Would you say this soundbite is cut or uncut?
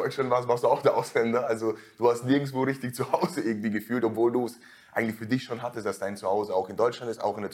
uncut